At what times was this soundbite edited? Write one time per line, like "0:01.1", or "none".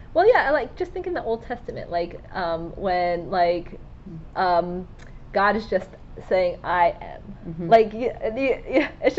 none